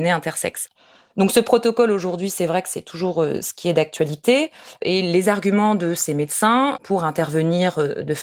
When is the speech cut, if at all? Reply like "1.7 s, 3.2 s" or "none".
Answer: none

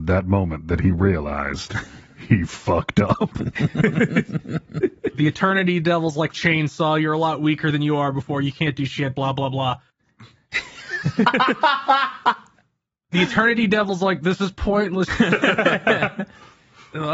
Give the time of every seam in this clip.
6.3 s, 9.9 s, 15.1 s

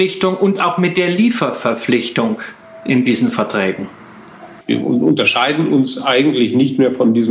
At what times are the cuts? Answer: 4.6 s

